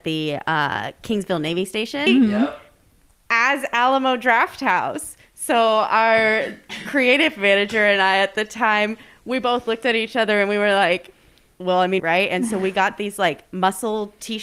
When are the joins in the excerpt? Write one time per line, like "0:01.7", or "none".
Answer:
0:02.1
0:12.0